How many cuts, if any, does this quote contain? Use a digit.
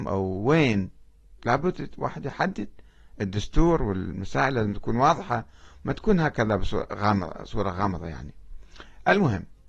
1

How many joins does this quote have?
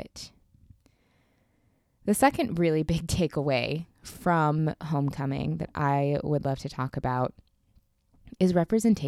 0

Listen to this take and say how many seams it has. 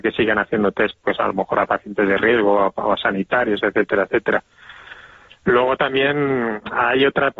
0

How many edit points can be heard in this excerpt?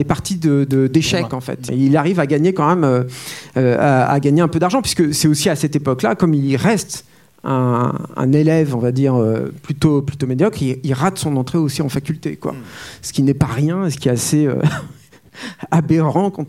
1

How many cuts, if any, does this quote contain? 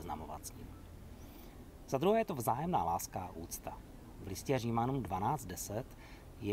0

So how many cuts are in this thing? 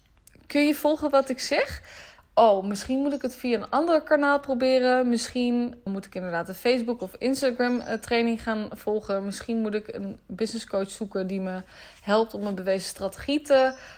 2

